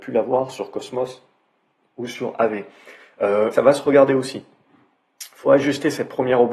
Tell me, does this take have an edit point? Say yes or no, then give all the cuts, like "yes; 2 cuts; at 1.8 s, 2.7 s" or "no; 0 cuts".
yes; 1 cut; at 3.5 s